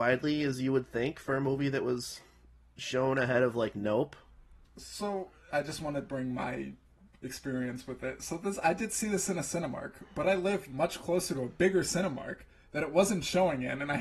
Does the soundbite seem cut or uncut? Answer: cut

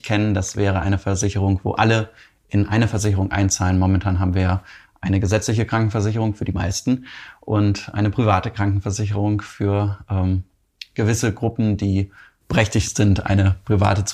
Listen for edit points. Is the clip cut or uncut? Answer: uncut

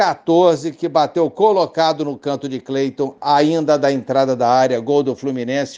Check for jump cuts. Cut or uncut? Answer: uncut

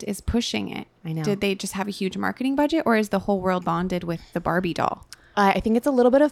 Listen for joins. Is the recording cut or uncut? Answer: cut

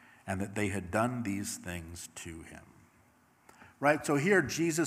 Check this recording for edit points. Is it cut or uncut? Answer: uncut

